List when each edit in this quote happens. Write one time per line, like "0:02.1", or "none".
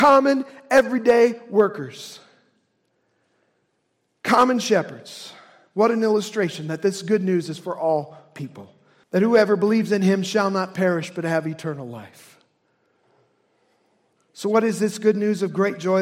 0:09.0
0:14.2